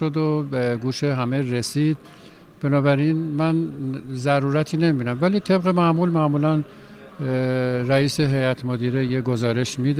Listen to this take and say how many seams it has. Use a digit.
0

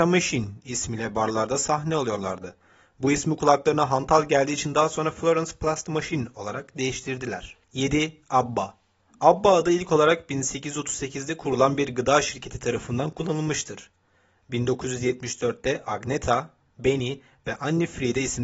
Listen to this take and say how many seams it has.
1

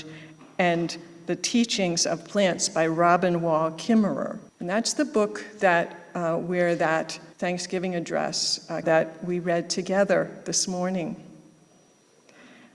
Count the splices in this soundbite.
3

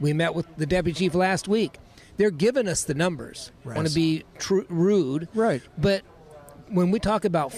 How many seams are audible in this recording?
1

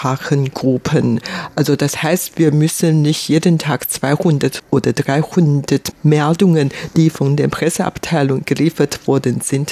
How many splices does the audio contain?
0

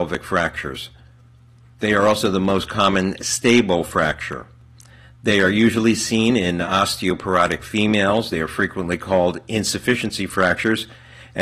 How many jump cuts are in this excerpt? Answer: 0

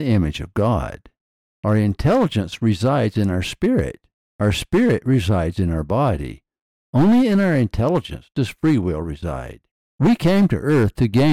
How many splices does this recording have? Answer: 1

